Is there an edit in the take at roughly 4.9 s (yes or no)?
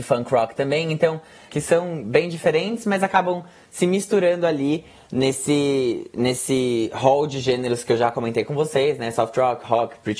no